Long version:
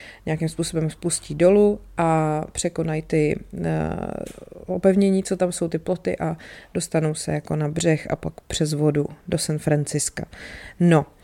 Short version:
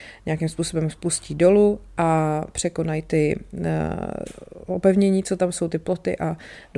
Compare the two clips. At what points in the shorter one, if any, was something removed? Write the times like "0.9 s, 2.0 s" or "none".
none